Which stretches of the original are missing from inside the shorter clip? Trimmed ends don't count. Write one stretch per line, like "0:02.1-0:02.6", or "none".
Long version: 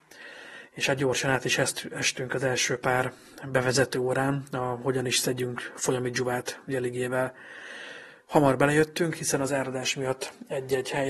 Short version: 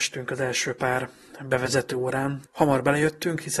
0:04.5-0:08.2